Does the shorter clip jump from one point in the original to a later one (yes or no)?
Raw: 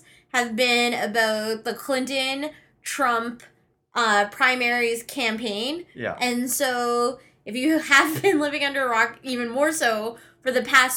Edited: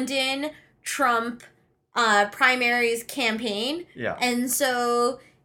no